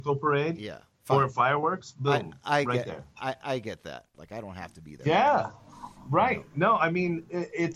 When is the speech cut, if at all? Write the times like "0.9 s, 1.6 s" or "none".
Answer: 4.1 s